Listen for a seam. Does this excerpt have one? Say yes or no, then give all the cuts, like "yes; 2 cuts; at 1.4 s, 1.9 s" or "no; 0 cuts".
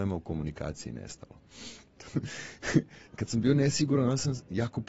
yes; 2 cuts; at 2.0 s, 3.1 s